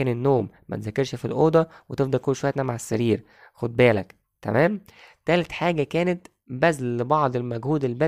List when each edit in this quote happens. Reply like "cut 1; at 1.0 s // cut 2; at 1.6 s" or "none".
none